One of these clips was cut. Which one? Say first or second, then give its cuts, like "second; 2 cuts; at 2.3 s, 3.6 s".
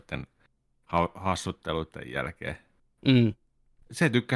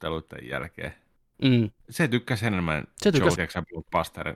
second; 2 cuts; at 1.8 s, 3.4 s